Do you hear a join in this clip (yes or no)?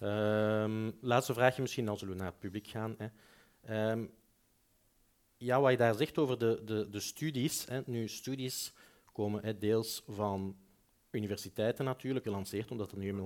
yes